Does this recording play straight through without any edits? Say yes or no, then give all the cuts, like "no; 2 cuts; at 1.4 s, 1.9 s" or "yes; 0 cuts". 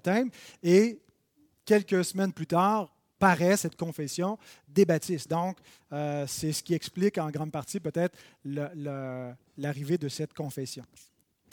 yes; 0 cuts